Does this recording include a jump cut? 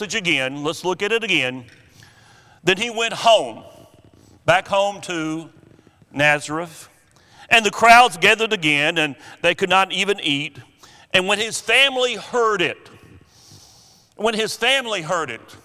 no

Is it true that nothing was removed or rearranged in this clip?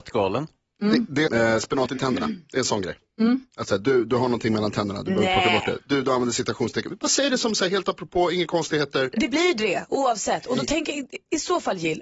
no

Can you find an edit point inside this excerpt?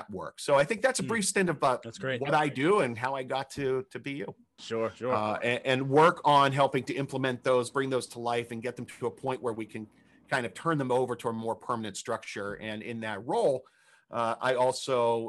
yes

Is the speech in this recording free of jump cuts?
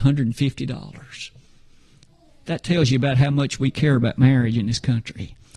yes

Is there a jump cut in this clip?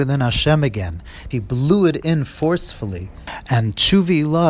yes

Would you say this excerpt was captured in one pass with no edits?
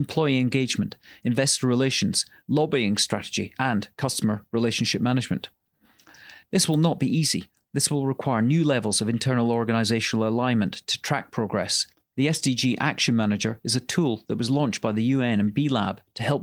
yes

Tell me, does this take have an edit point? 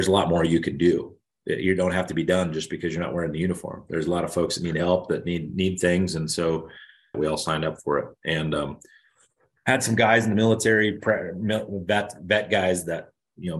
yes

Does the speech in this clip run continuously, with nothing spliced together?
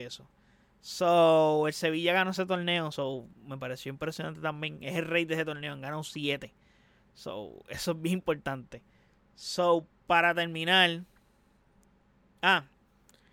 yes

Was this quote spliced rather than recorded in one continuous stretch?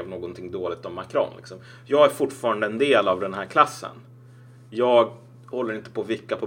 no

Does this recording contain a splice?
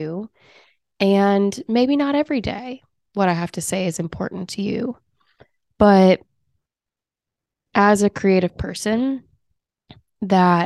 no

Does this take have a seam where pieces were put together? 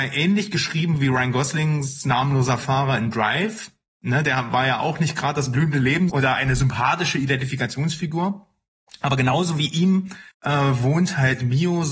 yes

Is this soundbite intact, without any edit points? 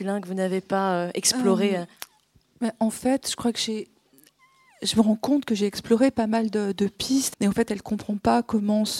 no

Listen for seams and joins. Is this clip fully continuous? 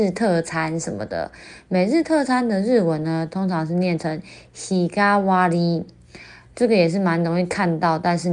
yes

